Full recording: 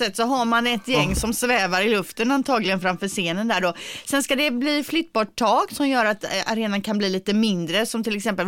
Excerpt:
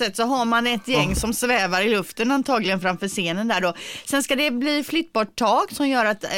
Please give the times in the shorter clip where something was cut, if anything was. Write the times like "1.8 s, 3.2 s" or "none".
none